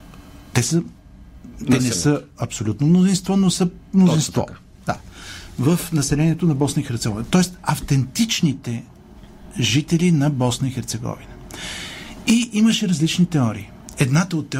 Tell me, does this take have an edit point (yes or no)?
no